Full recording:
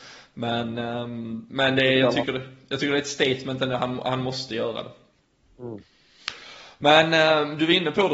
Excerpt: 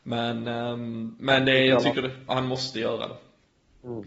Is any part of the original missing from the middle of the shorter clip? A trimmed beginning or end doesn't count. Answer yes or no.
yes